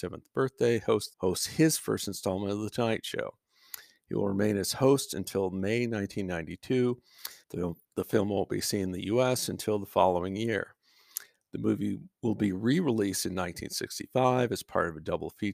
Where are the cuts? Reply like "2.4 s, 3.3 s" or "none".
1.1 s, 7.4 s